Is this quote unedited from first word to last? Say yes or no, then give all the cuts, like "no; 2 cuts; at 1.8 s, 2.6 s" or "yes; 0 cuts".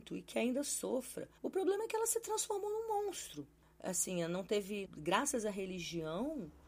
no; 2 cuts; at 1.4 s, 4.8 s